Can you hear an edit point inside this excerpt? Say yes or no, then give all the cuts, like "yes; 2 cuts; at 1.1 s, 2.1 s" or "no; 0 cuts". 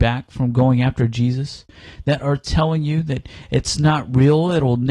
no; 0 cuts